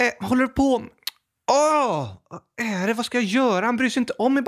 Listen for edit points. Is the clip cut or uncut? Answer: uncut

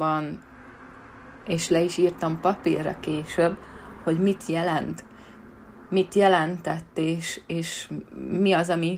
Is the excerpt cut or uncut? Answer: uncut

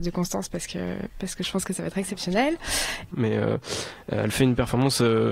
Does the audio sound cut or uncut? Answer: cut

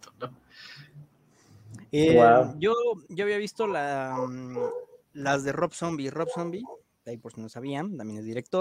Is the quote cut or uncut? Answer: uncut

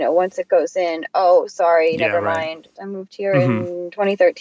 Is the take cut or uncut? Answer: cut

